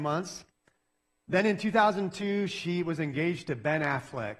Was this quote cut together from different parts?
no; 0 cuts

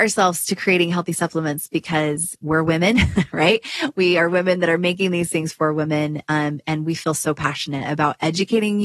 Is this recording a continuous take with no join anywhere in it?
yes; 0 cuts

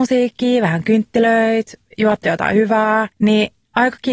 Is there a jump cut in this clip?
yes; 1 cut; at 3.1 s

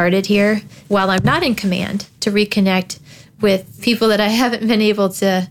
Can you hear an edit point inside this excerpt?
no; 0 cuts

